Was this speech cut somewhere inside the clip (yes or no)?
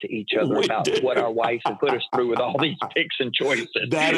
yes